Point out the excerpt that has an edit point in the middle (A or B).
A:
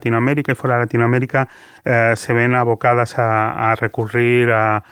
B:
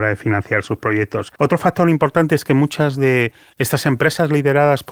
B